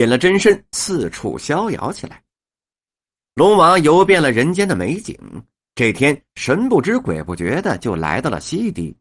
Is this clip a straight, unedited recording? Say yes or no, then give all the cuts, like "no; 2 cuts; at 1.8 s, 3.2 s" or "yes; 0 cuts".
yes; 0 cuts